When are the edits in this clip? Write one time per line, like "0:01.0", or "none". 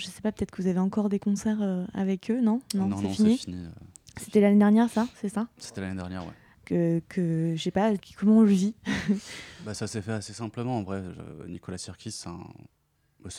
0:06.5
0:08.0